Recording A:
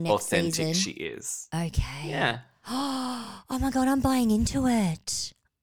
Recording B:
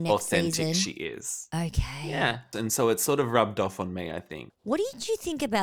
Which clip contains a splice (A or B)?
B